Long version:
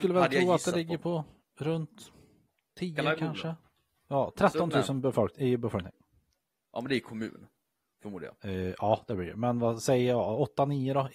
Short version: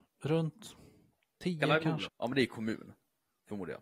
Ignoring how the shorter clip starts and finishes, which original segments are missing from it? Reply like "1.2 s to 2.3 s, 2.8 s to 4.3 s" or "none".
3.4 s to 6.6 s